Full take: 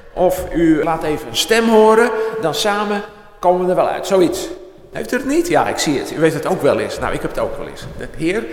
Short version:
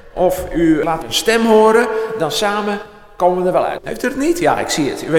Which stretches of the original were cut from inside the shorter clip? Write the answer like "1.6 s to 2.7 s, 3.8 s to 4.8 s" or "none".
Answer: 1.0 s to 1.2 s, 4.0 s to 4.9 s